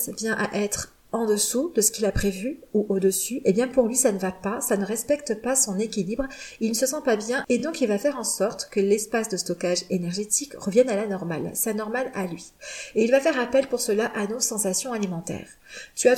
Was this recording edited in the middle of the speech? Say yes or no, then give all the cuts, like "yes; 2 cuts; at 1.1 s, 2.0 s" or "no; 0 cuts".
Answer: no; 0 cuts